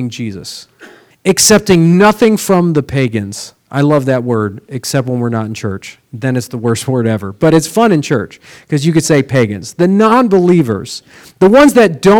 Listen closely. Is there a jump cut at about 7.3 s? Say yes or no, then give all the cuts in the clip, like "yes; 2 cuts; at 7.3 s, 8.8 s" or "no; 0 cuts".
no; 1 cut; at 1.1 s